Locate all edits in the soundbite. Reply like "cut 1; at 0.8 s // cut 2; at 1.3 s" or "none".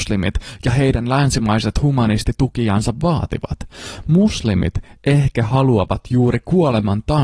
none

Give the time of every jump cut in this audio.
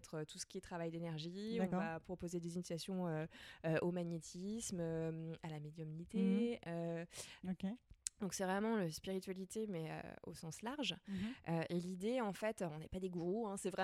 cut 1; at 7.4 s

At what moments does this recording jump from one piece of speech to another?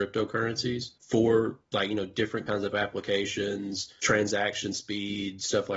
cut 1; at 1.0 s // cut 2; at 4.0 s

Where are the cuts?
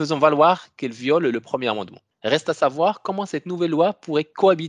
cut 1; at 2.1 s

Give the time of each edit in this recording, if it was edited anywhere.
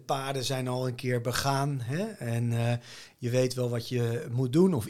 none

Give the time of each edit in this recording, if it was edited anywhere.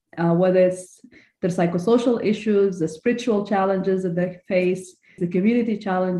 cut 1; at 5.2 s

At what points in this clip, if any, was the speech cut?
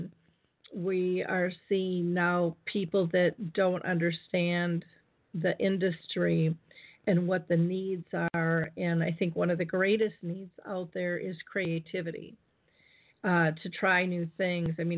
none

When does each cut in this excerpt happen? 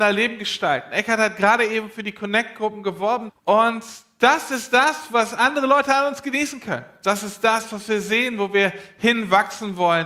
cut 1; at 3.3 s

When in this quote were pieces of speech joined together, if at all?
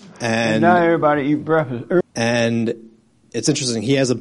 cut 1; at 2.0 s

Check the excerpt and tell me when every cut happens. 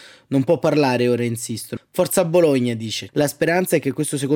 cut 1; at 1.8 s // cut 2; at 3.1 s

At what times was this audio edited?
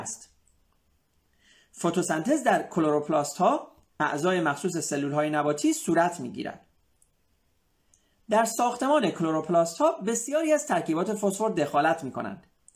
none

